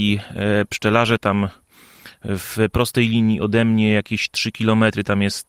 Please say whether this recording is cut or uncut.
uncut